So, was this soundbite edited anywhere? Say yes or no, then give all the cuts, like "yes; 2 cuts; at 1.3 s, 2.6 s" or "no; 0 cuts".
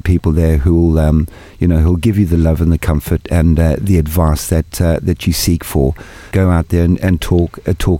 yes; 1 cut; at 6.3 s